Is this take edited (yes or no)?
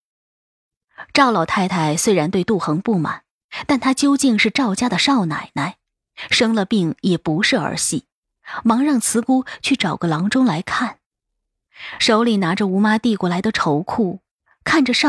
no